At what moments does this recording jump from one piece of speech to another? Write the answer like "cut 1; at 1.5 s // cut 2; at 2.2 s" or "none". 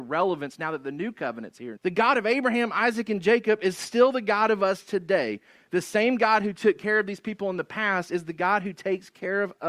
cut 1; at 1.8 s